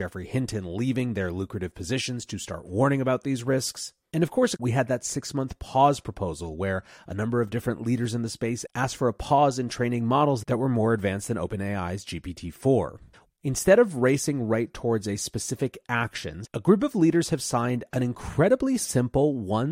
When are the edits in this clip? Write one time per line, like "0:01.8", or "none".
0:04.6
0:13.3
0:16.5

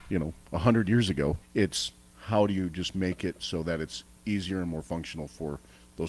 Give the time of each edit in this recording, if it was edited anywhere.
0:01.4

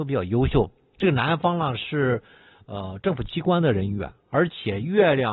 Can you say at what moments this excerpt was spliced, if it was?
none

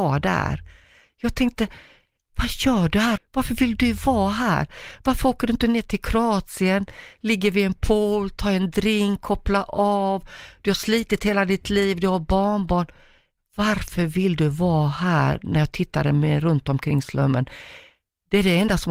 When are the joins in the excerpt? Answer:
0:03.2

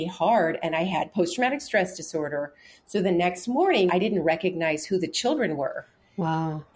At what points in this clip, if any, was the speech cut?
0:03.9

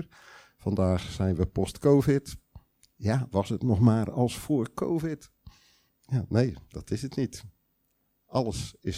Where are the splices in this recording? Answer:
none

